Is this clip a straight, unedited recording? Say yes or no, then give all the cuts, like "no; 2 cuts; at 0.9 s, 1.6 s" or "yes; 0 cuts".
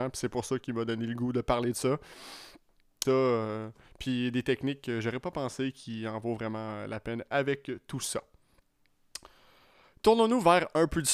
no; 1 cut; at 3.0 s